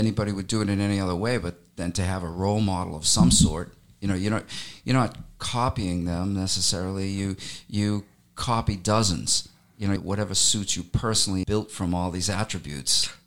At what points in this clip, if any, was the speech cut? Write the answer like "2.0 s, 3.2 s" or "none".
10.0 s, 11.4 s